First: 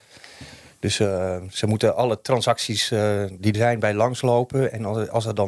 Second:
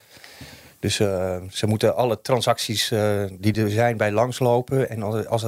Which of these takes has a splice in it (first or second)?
first